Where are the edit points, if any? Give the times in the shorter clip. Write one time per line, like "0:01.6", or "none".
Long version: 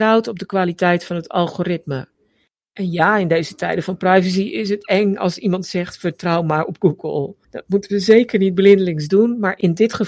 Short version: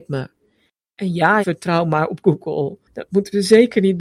0:01.4